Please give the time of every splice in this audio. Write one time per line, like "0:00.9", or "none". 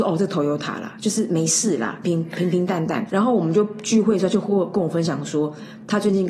0:02.0
0:03.1